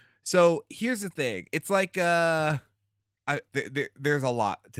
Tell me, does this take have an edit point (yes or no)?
yes